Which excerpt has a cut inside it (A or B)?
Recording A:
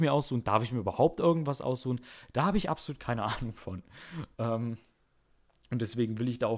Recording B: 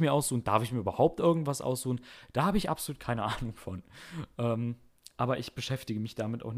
A